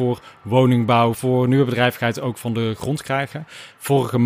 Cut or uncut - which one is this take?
cut